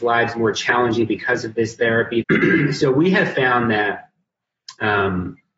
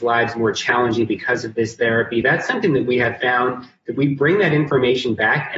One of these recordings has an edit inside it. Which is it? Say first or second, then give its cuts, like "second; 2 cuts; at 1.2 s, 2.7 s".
first; 1 cut; at 2.2 s